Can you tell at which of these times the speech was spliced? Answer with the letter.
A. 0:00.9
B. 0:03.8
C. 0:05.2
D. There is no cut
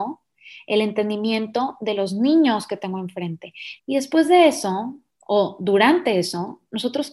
B